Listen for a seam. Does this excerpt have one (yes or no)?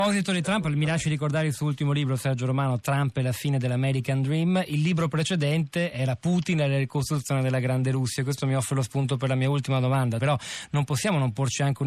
yes